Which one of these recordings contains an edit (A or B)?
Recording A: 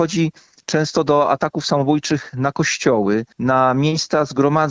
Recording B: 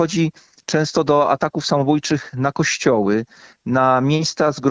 A